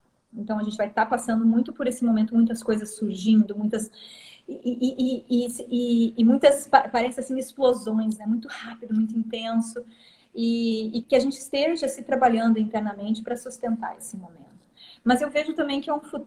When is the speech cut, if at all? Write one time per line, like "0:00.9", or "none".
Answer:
0:11.0

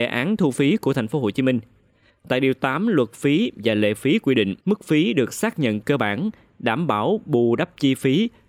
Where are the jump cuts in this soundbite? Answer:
0:02.1
0:04.6

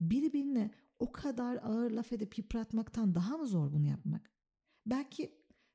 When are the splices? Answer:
none

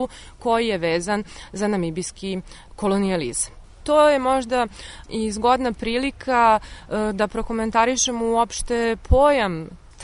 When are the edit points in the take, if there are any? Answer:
0:03.8

